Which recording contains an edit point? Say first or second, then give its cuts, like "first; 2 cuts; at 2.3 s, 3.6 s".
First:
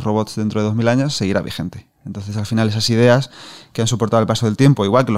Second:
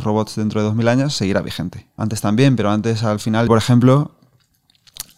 second; 2 cuts; at 2.0 s, 3.5 s